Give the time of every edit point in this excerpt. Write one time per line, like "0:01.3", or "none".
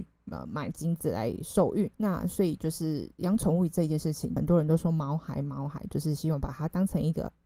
0:01.9
0:04.4